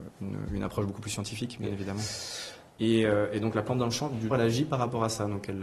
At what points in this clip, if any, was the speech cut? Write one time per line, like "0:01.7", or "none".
0:02.7
0:04.3